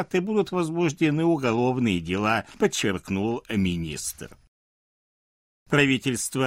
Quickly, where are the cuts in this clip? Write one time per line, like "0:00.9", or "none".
none